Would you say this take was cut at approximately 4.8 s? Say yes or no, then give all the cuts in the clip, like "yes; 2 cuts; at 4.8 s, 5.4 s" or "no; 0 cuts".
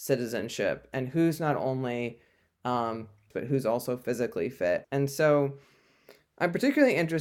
yes; 2 cuts; at 3.3 s, 4.8 s